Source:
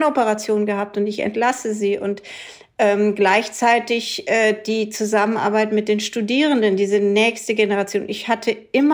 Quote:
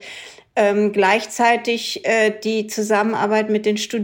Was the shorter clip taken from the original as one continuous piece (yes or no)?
yes